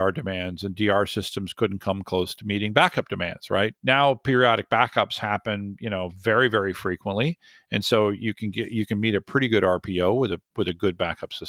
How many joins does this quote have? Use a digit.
1